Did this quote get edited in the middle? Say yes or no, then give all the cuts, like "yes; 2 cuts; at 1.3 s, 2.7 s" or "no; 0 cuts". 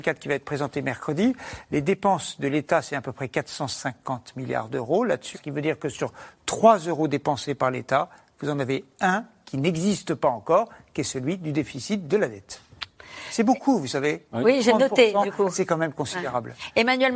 yes; 1 cut; at 5.3 s